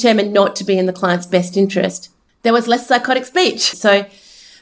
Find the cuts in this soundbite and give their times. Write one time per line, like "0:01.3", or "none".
0:02.3
0:03.7